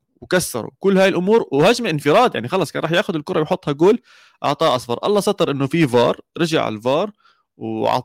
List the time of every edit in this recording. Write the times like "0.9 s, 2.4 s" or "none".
none